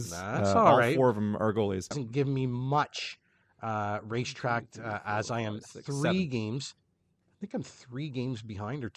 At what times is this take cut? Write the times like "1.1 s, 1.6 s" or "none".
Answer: 1.9 s